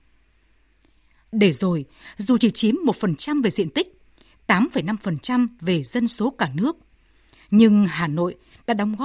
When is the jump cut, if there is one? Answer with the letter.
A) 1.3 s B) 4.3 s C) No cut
A